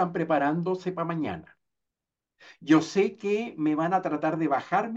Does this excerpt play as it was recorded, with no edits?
yes; 0 cuts

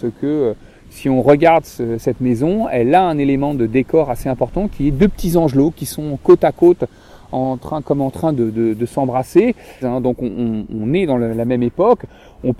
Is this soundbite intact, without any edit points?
no; 1 cut; at 9.8 s

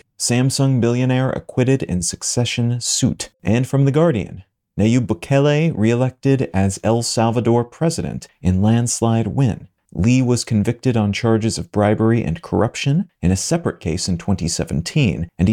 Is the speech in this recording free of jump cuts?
no; 2 cuts; at 3.3 s, 9.9 s

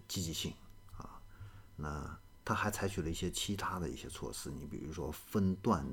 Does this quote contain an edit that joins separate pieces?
no; 0 cuts

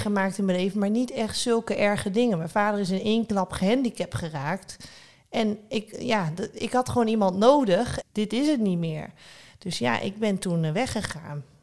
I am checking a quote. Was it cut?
yes; 1 cut; at 8.0 s

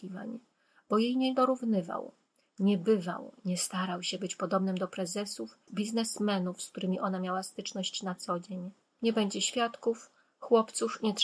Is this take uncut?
no; 2 cuts; at 5.7 s, 8.9 s

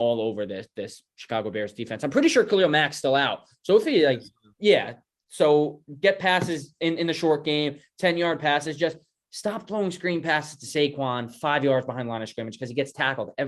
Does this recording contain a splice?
no; 0 cuts

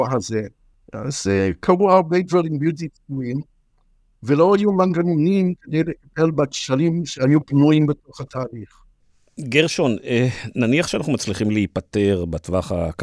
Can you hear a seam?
no; 0 cuts

